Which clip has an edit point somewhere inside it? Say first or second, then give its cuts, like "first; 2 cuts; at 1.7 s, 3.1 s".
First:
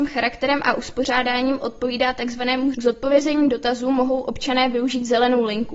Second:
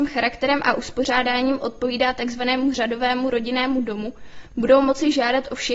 first; 1 cut; at 2.7 s